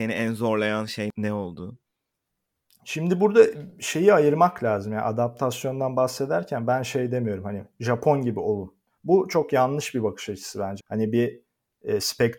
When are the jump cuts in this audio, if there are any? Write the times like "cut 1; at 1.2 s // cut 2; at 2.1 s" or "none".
cut 1; at 10.8 s